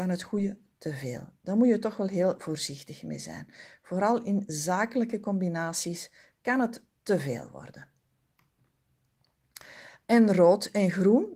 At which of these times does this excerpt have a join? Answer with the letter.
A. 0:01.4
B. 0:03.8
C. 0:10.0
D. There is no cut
D